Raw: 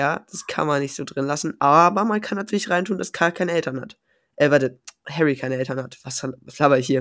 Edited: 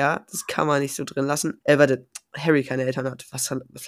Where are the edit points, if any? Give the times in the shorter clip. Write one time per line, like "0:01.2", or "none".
0:01.6